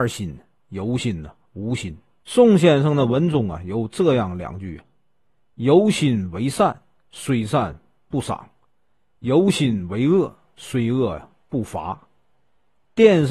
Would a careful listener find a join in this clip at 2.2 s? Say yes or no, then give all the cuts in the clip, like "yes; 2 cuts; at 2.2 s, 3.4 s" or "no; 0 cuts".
yes; 1 cut; at 2.2 s